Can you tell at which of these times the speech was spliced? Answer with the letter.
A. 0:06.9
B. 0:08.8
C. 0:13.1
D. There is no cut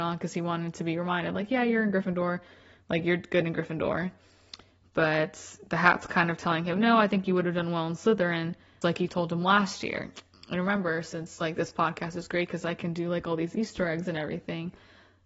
B